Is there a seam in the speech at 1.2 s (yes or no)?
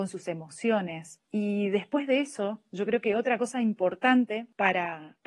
no